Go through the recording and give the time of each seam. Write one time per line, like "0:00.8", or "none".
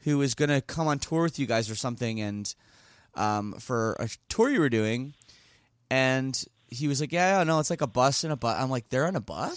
none